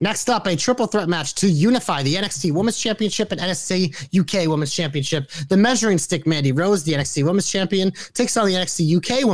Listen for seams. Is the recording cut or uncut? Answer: uncut